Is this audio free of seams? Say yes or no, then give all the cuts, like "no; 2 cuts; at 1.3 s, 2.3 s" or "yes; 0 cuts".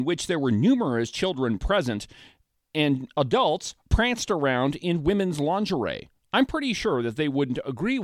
no; 1 cut; at 3.9 s